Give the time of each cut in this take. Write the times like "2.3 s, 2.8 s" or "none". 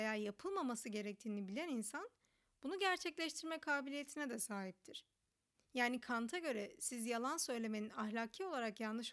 none

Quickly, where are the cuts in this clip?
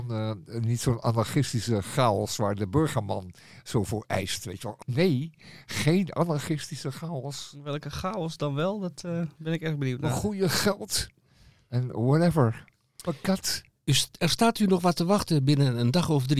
4.8 s

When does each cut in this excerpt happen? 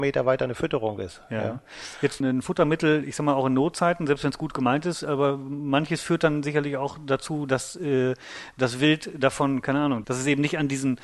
2.2 s, 10.0 s

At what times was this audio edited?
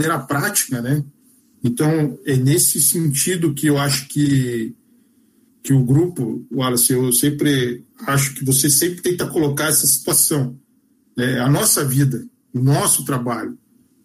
1.5 s

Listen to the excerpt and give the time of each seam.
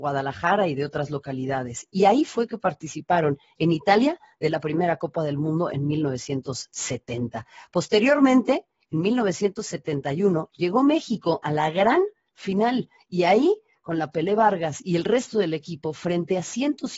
none

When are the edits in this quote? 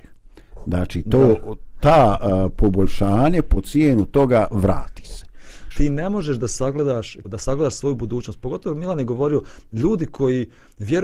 5.7 s, 7.2 s

